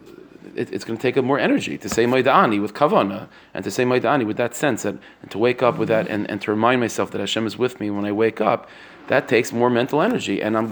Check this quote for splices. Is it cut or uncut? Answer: uncut